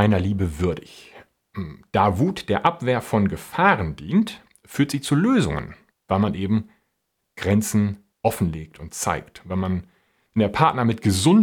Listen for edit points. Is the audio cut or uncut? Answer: cut